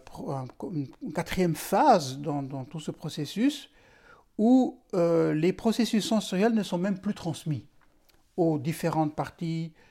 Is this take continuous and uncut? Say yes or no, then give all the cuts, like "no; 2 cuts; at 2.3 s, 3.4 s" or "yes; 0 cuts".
yes; 0 cuts